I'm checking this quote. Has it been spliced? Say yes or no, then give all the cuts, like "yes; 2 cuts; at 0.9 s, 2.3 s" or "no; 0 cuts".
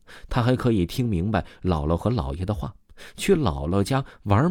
no; 0 cuts